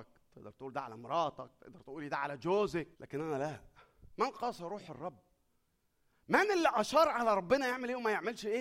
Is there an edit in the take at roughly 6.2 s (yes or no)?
no